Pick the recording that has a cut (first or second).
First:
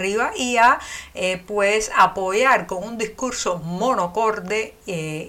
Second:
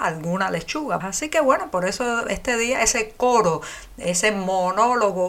second